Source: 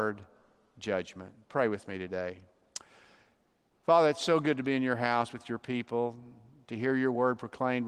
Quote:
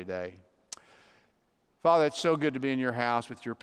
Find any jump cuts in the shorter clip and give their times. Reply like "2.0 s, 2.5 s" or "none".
none